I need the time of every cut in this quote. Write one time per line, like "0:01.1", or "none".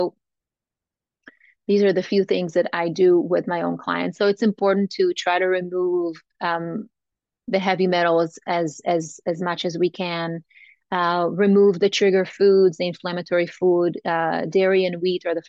none